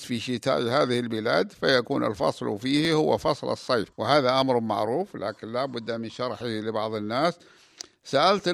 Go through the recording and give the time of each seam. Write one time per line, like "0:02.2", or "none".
0:03.9